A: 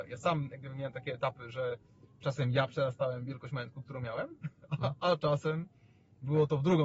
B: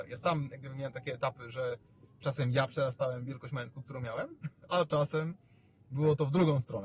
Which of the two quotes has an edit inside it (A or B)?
B